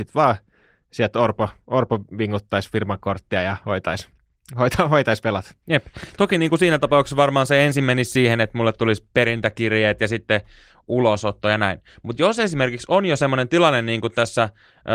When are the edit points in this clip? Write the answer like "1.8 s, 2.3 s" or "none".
none